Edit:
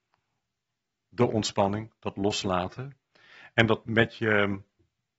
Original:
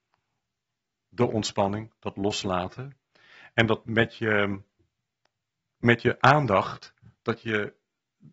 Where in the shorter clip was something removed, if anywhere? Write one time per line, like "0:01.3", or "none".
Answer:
none